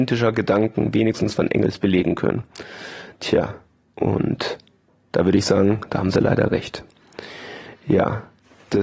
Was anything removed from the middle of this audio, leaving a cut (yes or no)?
no